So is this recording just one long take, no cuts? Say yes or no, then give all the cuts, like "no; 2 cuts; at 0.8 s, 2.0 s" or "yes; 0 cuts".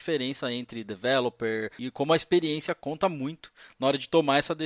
no; 1 cut; at 1.8 s